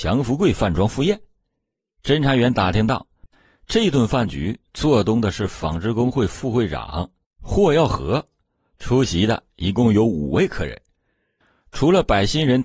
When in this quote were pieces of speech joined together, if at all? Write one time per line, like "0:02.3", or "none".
none